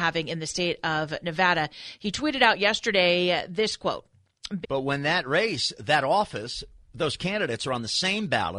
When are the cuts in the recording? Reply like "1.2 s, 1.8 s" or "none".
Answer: 4.6 s